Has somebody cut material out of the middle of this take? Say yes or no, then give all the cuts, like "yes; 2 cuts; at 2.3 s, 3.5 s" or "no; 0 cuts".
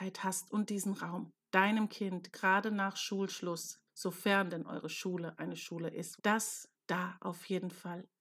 yes; 3 cuts; at 1.4 s, 3.9 s, 6.2 s